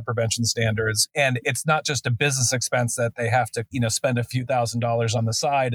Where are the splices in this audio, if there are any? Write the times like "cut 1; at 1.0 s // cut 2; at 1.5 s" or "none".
none